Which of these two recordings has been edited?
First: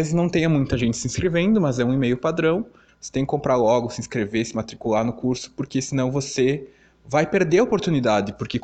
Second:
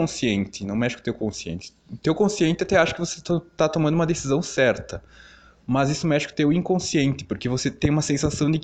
first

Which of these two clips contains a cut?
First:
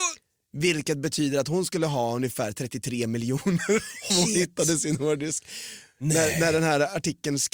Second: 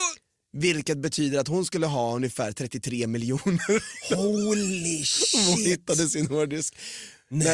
first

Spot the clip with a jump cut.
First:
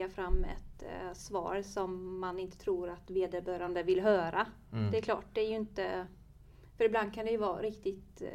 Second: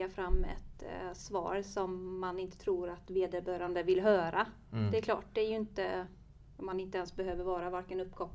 second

